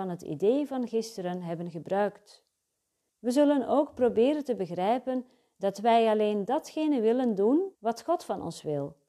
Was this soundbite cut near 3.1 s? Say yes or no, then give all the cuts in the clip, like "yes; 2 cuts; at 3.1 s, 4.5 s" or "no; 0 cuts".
yes; 2 cuts; at 3.1 s, 7.7 s